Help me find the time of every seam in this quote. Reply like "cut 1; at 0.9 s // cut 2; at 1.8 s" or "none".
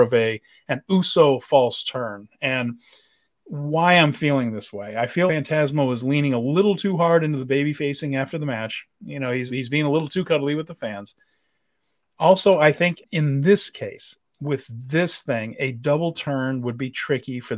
cut 1; at 5.3 s // cut 2; at 9.5 s // cut 3; at 13.0 s